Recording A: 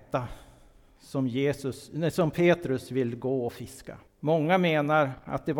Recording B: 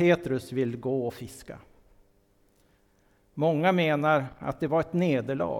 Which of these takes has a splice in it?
A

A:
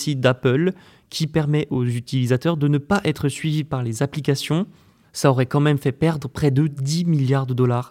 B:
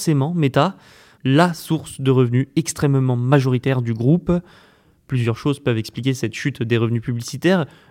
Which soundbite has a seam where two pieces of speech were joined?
B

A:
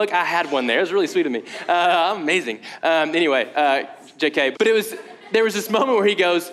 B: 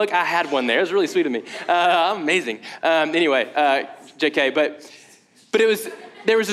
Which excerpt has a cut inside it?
A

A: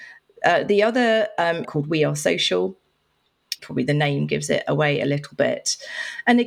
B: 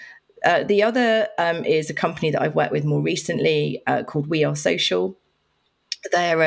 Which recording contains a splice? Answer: A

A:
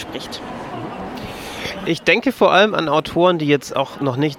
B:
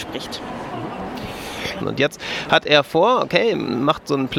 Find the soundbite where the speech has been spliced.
B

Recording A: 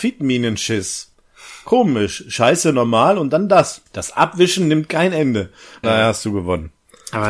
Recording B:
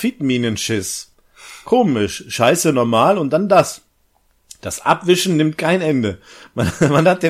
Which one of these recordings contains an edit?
A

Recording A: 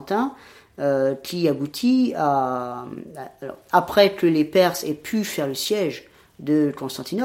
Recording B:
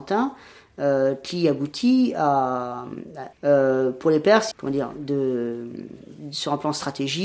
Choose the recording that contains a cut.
B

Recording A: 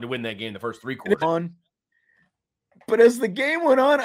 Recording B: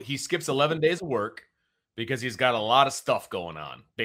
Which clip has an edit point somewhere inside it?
A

